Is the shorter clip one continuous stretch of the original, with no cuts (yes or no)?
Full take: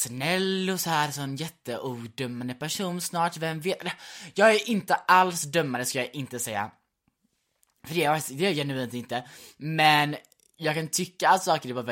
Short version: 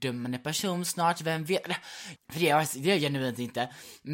no